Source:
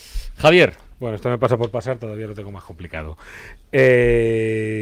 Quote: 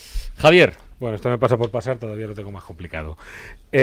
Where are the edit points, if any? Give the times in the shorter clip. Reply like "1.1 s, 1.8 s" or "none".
none